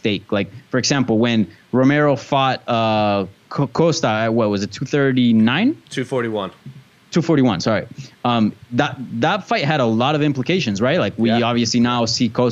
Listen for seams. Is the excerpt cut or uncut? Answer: uncut